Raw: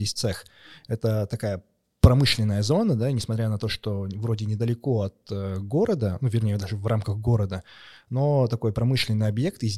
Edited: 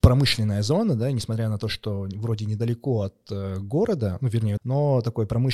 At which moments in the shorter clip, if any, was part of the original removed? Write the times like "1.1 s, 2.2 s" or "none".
4.6 s